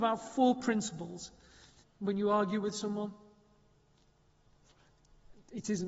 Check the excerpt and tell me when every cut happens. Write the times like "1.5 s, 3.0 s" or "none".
1.8 s